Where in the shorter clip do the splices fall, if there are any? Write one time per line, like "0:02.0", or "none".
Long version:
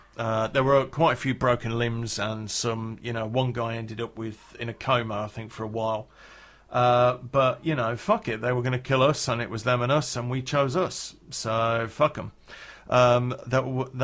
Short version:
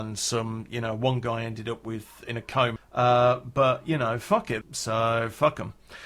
0:02.8
0:04.6